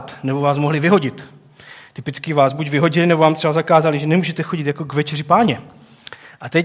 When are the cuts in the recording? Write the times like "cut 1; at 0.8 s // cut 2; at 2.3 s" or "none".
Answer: none